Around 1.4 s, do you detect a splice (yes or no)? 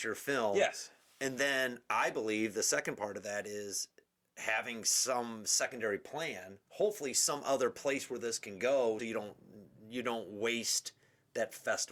no